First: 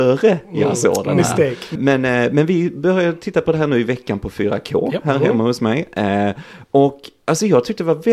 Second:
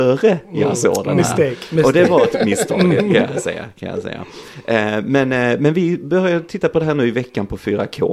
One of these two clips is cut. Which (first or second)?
first